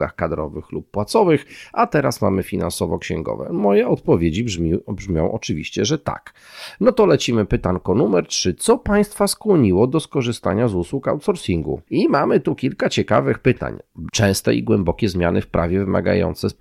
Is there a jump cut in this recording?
yes; 2 cuts; at 11.9 s, 14.1 s

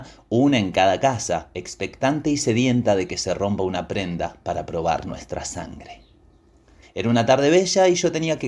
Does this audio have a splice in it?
yes; 1 cut; at 6.8 s

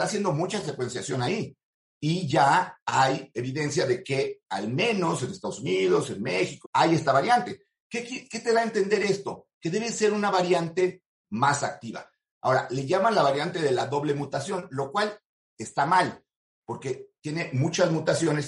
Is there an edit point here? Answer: yes; 1 cut; at 6.6 s

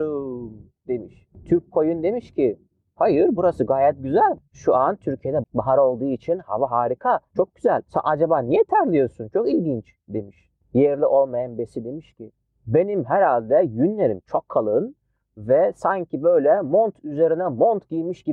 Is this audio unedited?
no; 1 cut; at 5.4 s

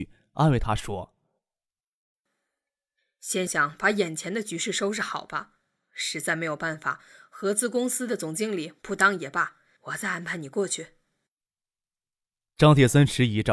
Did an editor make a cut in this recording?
yes; 2 cuts; at 3.5 s, 9.8 s

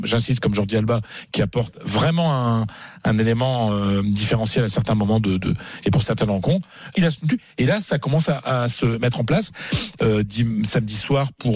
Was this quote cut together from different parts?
yes; 2 cuts; at 6.9 s, 10.0 s

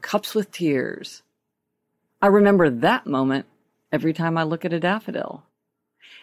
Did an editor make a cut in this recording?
no; 0 cuts

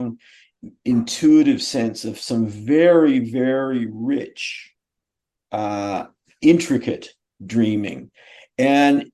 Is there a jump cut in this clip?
no; 0 cuts

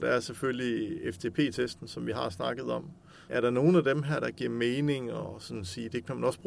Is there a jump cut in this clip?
yes; 1 cut; at 3.3 s

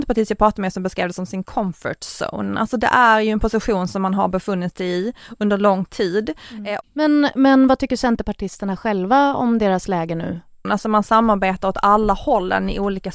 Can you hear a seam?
yes; 2 cuts; at 6.8 s, 10.6 s

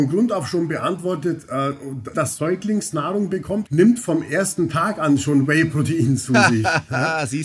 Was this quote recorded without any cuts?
no; 2 cuts; at 2.1 s, 3.7 s

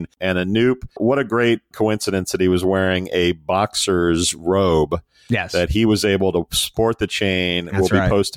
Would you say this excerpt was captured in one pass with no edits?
no; 1 cut; at 1.7 s

